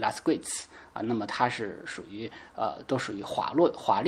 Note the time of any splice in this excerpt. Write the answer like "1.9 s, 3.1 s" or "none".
none